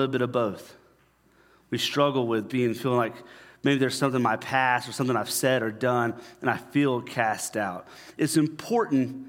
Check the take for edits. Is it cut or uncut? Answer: uncut